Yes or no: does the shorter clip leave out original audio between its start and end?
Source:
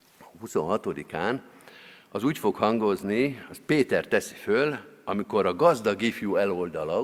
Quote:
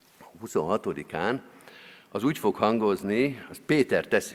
no